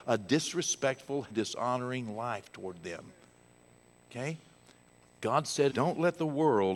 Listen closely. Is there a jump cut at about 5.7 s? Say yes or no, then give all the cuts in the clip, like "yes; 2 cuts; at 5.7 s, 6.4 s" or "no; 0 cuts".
yes; 2 cuts; at 1.3 s, 5.7 s